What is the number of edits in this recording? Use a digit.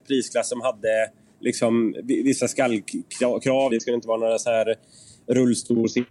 1